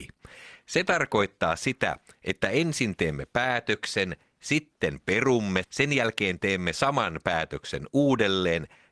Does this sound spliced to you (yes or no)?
yes